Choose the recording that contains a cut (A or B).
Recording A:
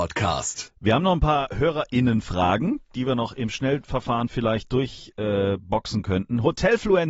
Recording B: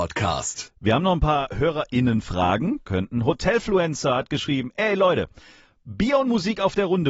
B